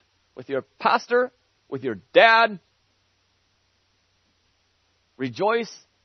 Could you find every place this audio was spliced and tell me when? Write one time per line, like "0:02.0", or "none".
none